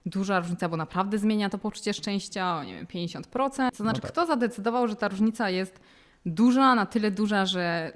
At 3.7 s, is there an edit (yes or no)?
yes